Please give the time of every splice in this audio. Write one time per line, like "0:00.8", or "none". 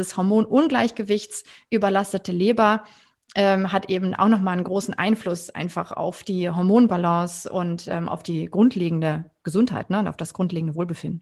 none